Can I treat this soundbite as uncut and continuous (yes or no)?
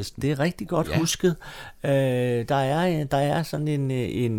yes